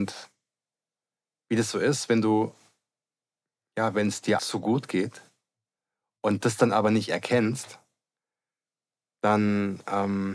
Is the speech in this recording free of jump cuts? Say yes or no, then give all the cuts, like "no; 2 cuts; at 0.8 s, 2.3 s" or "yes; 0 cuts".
no; 1 cut; at 4.4 s